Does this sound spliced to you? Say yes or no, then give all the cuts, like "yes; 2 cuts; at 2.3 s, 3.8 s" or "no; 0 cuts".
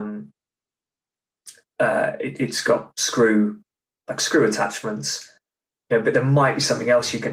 no; 0 cuts